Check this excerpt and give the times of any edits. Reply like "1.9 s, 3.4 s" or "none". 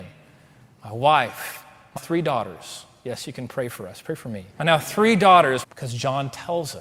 2.0 s, 4.5 s, 5.6 s